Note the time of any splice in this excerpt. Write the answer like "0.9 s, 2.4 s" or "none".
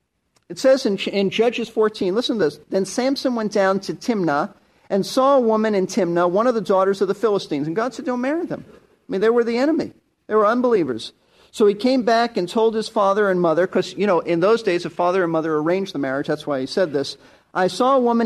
none

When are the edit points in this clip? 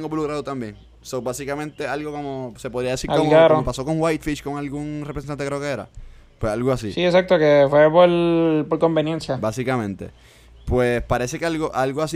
none

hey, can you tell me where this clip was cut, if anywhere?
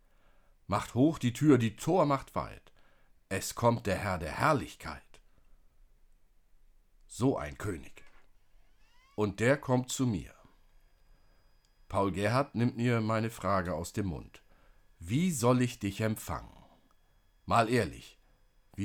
none

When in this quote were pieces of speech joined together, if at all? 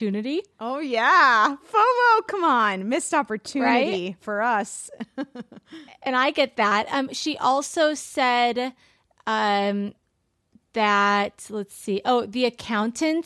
none

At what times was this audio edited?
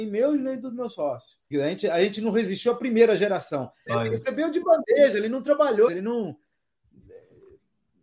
1.5 s, 3.9 s, 5.9 s

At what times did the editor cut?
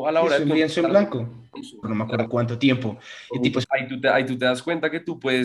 1.8 s, 3.6 s

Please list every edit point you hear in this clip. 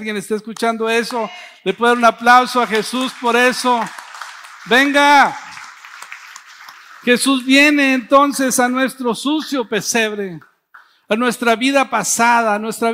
none

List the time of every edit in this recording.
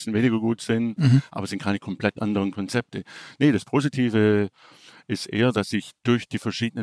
1.0 s

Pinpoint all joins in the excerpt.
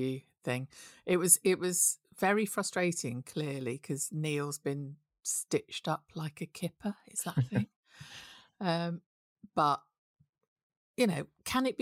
none

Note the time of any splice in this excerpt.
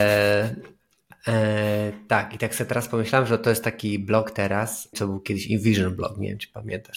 4.9 s

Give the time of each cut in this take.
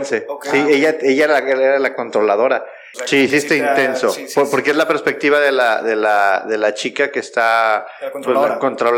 2.9 s

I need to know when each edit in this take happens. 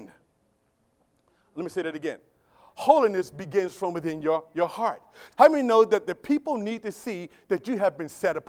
5.3 s

